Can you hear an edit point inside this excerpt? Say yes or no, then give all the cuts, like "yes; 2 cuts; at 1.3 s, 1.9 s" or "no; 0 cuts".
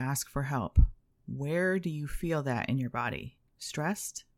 yes; 1 cut; at 3.5 s